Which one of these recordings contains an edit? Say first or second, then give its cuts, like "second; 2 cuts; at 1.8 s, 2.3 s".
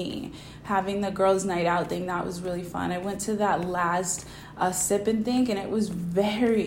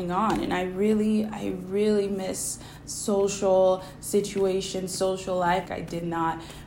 second; 1 cut; at 5.7 s